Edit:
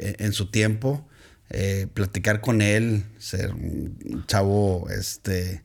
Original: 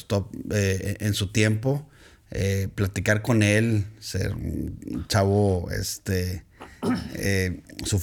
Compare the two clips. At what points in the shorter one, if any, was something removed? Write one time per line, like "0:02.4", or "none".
none